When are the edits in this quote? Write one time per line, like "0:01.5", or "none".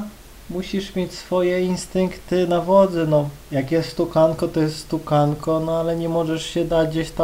none

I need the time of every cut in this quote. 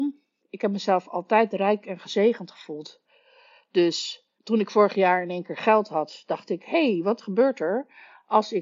0:04.4

